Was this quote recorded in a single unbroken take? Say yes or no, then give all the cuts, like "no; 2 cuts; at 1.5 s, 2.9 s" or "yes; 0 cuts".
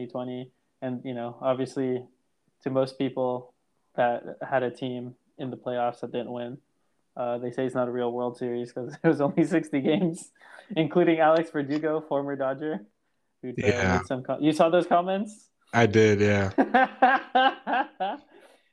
no; 2 cuts; at 3.9 s, 13.5 s